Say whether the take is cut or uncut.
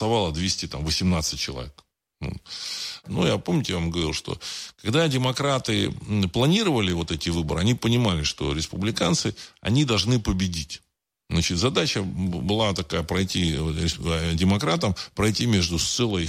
cut